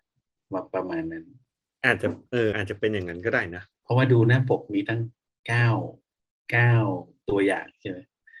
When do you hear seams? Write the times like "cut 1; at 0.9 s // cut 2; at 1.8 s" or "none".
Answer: cut 1; at 2.5 s // cut 2; at 3.7 s